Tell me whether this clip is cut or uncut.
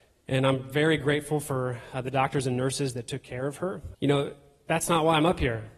cut